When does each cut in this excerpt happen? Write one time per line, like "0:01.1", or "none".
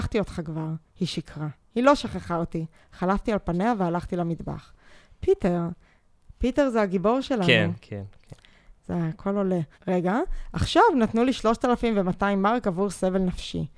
0:09.7

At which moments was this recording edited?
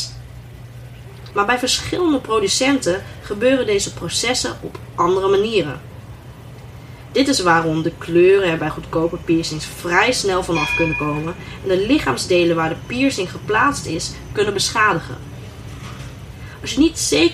0:01.3

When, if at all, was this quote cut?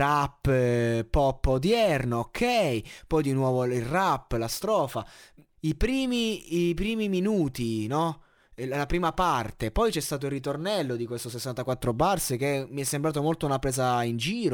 0:05.5

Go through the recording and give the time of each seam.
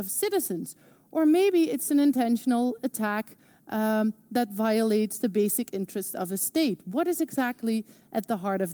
none

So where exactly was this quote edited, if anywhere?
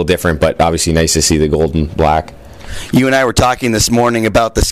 none

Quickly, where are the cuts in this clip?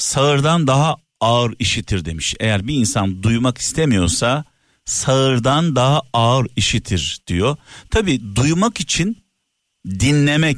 none

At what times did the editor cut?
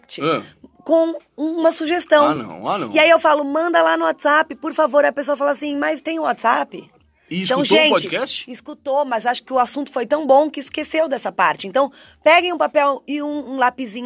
none

